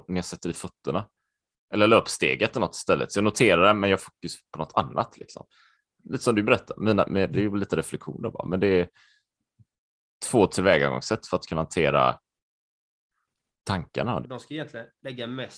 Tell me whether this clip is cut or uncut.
cut